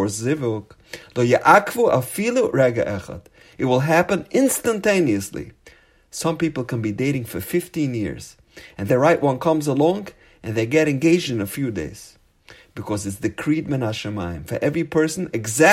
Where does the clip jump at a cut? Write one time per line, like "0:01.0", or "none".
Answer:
0:08.9